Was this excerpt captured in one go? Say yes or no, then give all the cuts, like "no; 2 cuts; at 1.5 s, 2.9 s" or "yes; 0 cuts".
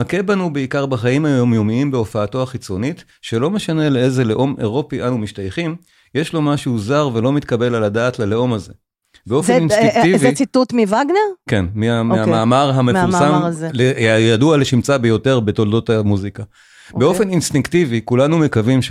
yes; 0 cuts